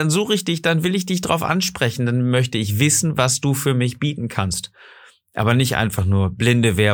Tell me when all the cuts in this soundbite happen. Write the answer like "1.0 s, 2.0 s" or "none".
none